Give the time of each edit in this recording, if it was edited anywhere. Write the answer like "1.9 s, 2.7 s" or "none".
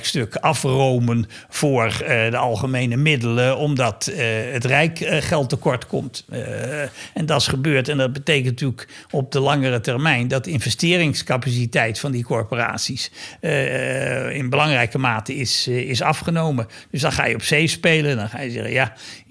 none